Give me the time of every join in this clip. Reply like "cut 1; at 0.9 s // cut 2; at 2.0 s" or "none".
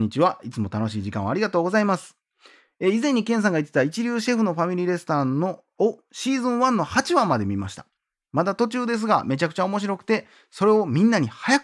none